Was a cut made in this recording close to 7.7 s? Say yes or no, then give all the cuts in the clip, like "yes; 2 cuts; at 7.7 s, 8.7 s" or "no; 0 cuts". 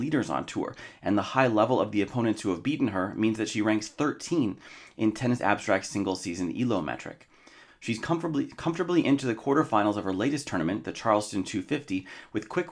yes; 1 cut; at 7.7 s